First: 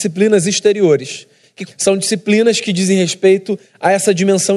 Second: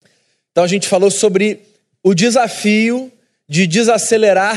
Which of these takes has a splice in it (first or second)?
first